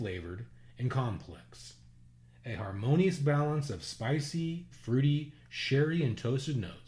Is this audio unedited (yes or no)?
no